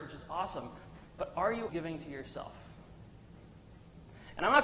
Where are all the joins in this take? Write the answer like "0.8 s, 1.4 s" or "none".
1.7 s

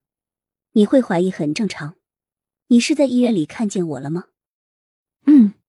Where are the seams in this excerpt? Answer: none

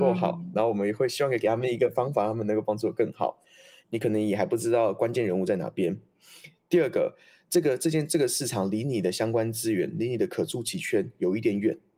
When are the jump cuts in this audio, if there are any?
3.8 s

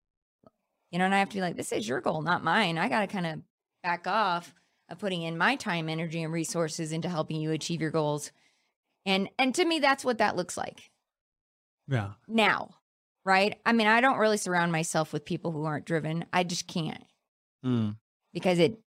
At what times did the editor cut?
none

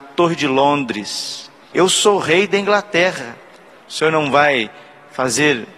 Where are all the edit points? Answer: 1.7 s, 3.8 s

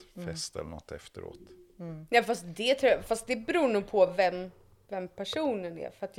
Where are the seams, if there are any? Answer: none

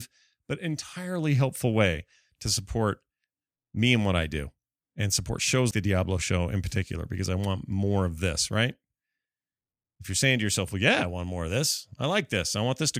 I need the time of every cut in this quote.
5.7 s

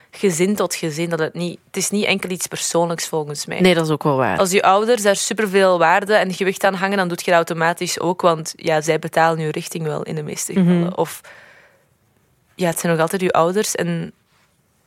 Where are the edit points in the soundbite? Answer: none

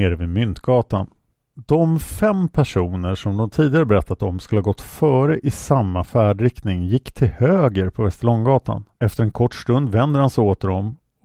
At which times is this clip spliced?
9.0 s

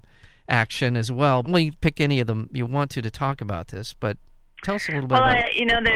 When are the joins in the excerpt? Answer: 1.4 s

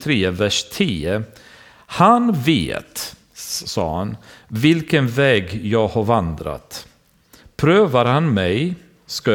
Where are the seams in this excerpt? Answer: none

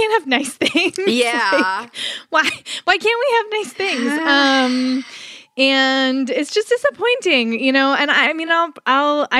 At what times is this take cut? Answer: none

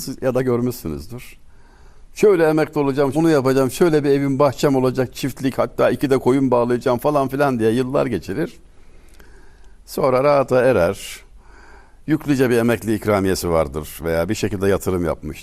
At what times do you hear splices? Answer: 3.1 s

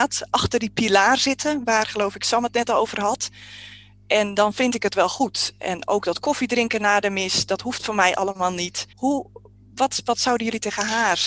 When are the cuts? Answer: 8.9 s

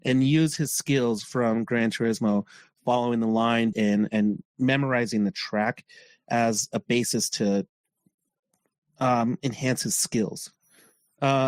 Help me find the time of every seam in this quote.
3.7 s

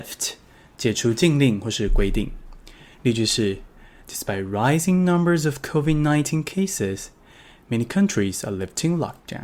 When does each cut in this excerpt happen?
none

